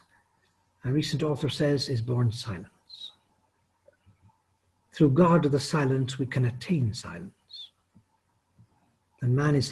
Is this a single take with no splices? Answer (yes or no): yes